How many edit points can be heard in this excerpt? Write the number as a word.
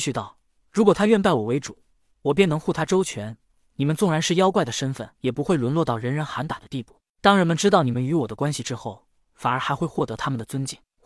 one